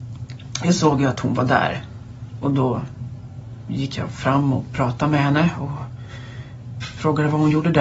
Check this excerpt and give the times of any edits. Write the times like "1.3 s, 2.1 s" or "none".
none